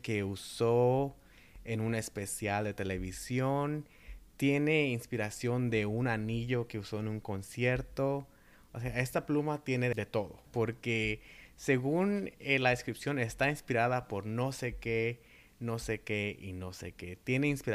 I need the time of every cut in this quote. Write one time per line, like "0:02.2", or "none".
0:10.4